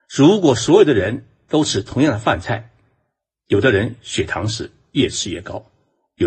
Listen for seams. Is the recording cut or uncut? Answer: uncut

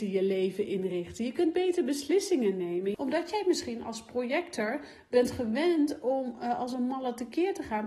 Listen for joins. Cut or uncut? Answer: cut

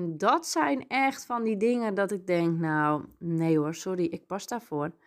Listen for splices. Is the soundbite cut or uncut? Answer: uncut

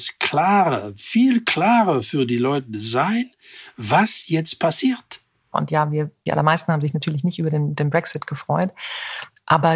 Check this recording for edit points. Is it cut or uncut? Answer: cut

